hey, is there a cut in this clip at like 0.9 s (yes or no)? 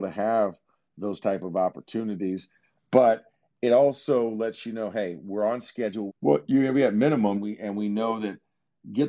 no